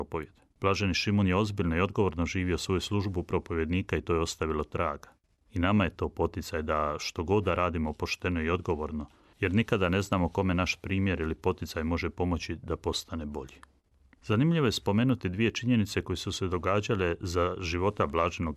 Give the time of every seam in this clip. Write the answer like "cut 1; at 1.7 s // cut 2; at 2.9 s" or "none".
cut 1; at 7.6 s